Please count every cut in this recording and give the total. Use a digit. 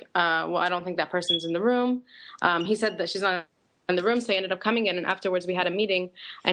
0